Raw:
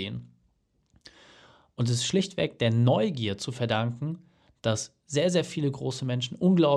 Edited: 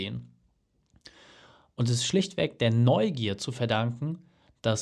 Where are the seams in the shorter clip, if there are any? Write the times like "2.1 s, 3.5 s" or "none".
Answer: none